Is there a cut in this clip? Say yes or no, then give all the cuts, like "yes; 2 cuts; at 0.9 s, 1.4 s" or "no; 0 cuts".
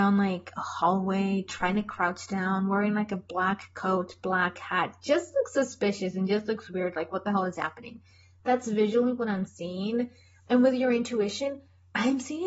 no; 0 cuts